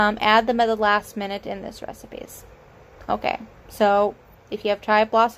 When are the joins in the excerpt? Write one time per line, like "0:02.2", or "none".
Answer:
none